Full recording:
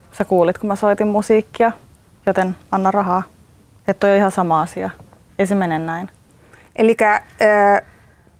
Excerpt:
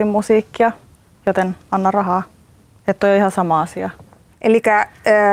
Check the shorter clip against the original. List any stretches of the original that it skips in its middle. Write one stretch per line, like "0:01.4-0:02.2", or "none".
0:05.3-0:06.7